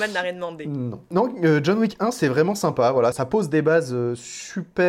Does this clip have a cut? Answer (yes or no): no